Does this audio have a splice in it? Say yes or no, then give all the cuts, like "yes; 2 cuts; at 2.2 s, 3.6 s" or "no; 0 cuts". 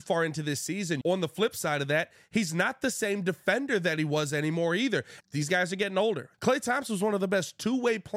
yes; 3 cuts; at 1.0 s, 5.2 s, 6.3 s